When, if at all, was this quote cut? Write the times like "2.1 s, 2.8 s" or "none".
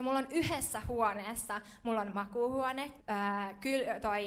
3.0 s